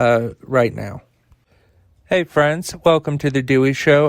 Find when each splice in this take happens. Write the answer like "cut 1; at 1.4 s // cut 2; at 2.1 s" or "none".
none